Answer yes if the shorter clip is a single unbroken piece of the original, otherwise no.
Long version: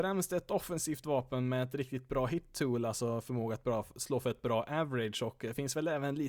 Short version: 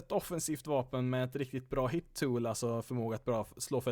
yes